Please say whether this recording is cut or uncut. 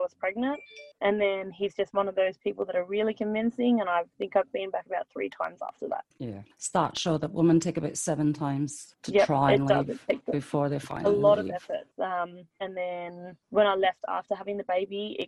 cut